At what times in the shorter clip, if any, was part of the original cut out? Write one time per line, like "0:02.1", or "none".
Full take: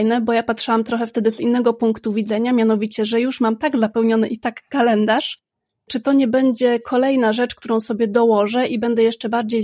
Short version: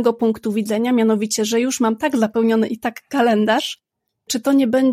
none